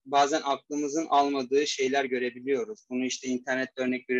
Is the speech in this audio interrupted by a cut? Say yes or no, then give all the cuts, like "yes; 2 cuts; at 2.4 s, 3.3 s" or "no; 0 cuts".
no; 0 cuts